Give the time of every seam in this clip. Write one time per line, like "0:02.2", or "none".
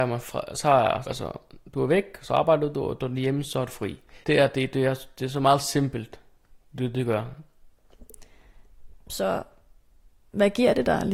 0:01.0
0:04.2

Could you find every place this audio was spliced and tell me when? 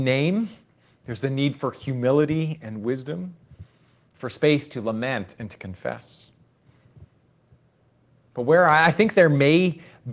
none

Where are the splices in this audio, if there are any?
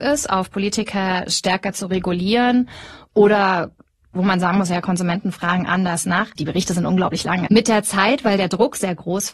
0:06.4
0:07.5

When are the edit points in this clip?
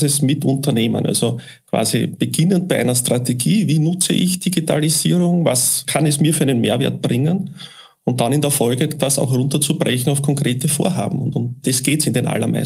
none

